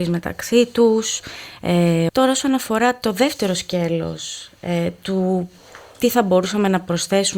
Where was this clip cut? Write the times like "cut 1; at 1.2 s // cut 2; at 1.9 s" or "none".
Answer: cut 1; at 2.1 s